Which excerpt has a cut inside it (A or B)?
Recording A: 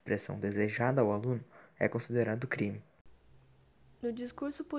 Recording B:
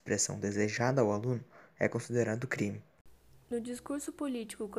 B